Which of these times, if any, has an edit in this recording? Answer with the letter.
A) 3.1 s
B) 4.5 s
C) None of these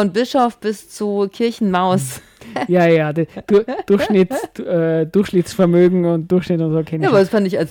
C